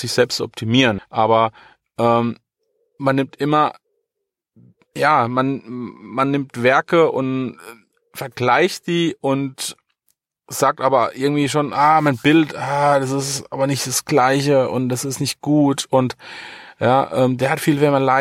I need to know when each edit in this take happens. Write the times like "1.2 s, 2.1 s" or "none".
1.0 s